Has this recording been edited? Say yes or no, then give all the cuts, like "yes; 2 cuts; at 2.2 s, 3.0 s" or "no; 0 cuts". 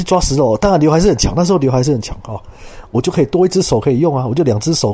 yes; 1 cut; at 2.9 s